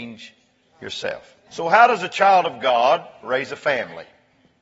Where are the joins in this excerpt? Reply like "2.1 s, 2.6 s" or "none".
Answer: 1.5 s